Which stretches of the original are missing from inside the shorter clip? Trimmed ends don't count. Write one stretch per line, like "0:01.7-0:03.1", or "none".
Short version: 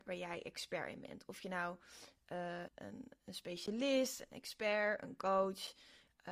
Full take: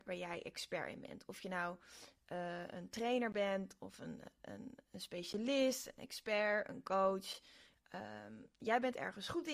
0:02.7-0:04.3